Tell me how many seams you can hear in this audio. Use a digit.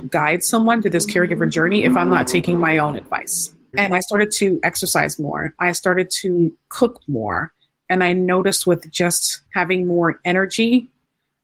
2